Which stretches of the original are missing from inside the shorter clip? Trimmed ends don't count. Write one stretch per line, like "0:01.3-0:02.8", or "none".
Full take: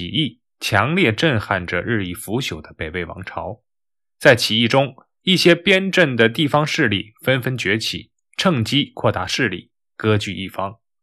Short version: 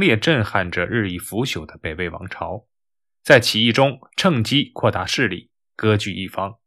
0:05.0-0:08.3